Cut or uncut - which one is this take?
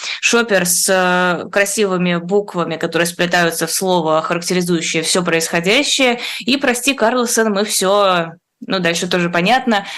uncut